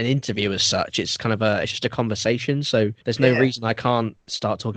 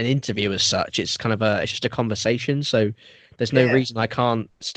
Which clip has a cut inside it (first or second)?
first